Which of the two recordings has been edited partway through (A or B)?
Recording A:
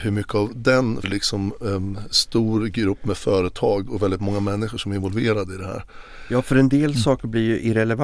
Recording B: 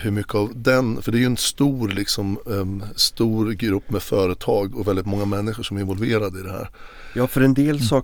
A